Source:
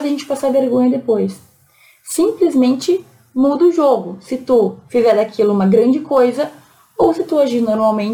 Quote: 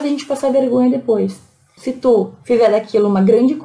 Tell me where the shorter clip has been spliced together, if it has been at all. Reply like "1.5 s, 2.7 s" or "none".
1.8 s